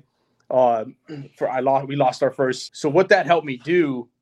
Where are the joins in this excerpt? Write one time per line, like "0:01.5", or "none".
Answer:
0:02.7